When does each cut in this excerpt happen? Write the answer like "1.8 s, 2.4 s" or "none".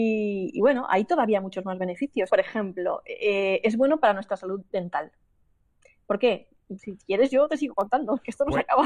2.3 s, 6.8 s